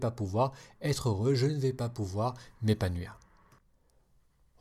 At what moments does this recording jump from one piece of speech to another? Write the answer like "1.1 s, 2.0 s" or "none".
none